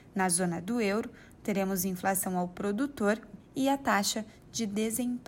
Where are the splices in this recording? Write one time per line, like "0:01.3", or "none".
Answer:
0:03.4

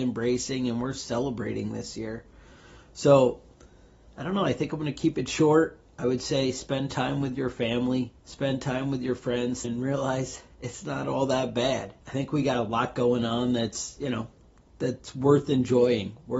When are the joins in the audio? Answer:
0:08.2
0:09.6
0:12.0

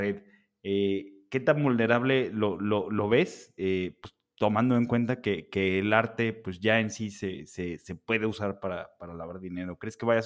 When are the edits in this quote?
none

